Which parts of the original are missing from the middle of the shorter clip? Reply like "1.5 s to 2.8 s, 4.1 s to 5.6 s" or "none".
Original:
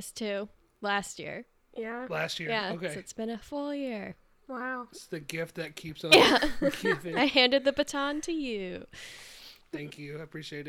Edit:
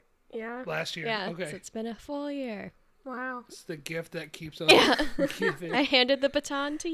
none